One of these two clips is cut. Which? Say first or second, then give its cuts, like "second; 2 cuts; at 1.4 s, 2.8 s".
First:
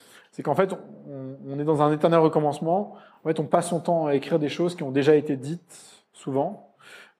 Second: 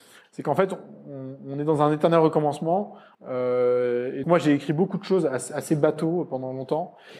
second; 2 cuts; at 3.1 s, 4.2 s